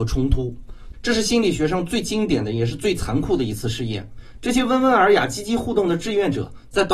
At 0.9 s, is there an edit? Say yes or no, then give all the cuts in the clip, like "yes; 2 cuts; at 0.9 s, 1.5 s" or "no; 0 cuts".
yes; 1 cut; at 0.9 s